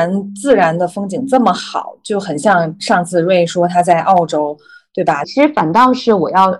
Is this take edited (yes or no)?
yes